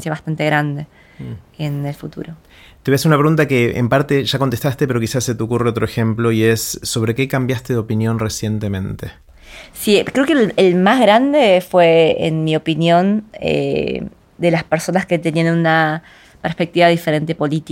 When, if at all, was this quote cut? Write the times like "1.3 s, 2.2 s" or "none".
none